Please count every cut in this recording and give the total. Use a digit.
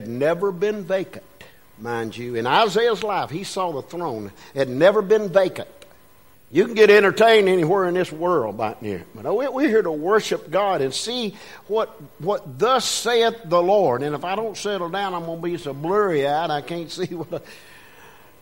1